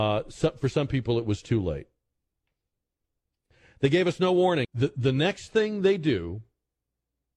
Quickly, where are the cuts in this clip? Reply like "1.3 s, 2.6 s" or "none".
4.6 s